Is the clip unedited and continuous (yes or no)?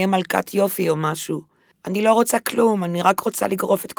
no